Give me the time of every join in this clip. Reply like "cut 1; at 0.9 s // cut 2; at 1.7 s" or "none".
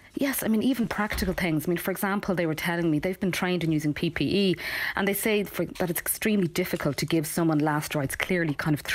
none